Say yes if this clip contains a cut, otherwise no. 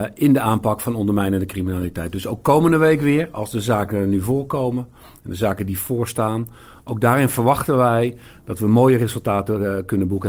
no